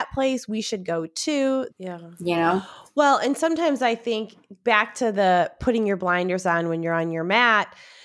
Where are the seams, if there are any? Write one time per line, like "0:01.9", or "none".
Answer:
0:01.7